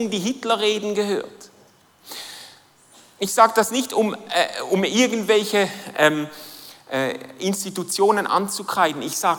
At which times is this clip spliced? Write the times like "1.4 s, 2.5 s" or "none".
none